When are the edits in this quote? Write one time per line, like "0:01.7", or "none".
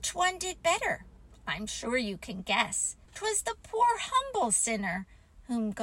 0:03.1